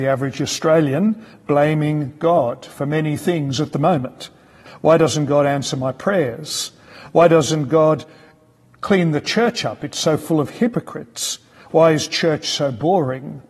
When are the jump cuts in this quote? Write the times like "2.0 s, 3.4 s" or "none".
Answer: 4.7 s